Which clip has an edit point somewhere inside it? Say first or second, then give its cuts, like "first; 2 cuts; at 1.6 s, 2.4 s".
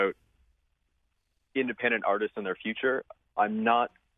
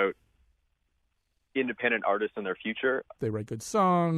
second; 1 cut; at 3.2 s